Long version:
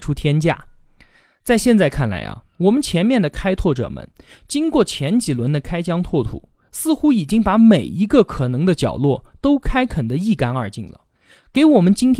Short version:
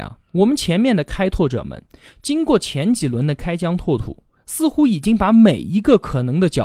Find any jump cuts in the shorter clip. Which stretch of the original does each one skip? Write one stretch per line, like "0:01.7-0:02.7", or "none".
none